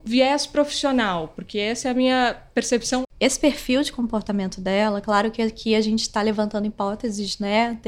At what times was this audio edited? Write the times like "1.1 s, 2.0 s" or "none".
3.0 s